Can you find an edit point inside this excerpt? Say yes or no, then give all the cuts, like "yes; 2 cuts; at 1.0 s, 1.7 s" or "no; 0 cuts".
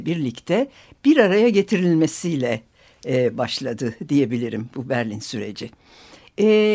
no; 0 cuts